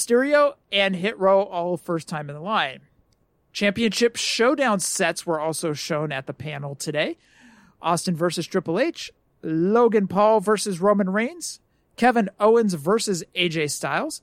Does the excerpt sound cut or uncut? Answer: uncut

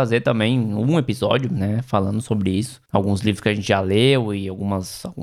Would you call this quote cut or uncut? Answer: cut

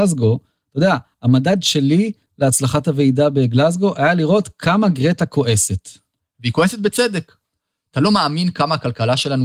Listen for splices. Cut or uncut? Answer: uncut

